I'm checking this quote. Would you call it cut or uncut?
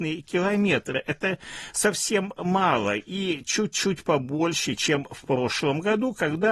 uncut